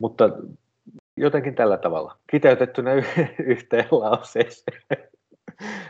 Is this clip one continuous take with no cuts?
no; 2 cuts; at 1.2 s, 2.2 s

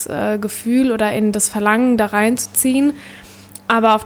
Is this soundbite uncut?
yes; 0 cuts

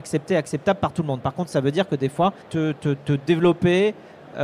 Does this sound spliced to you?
yes; 1 cut; at 2.4 s

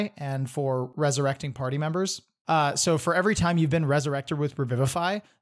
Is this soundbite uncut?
yes; 0 cuts

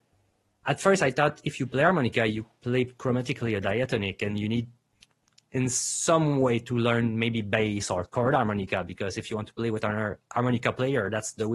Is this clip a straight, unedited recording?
yes; 0 cuts

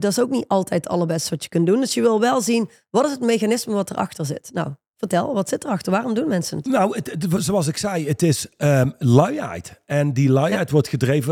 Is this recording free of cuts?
yes; 0 cuts

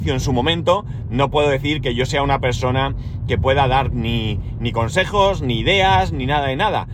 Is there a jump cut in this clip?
no; 0 cuts

